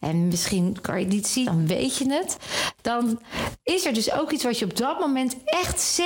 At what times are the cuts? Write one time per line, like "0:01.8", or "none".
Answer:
0:01.4

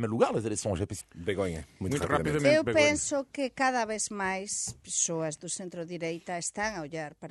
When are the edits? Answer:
0:01.0

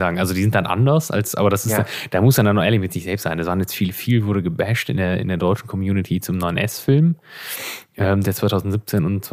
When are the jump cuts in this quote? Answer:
none

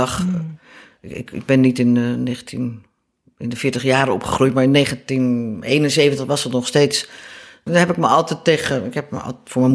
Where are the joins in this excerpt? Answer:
0:07.7

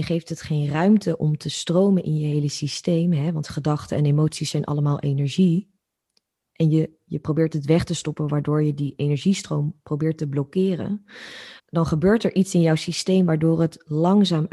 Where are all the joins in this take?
0:11.6

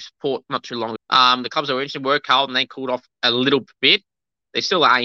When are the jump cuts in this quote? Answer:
0:01.0
0:03.1

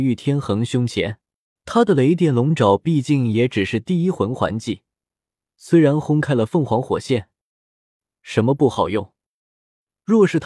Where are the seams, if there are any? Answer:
0:01.6
0:08.1

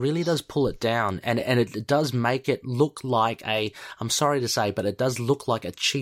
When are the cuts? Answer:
none

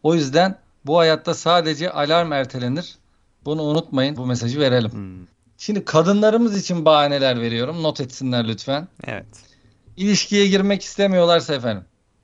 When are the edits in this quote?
0:04.2

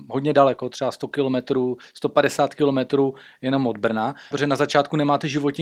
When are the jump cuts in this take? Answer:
0:04.3

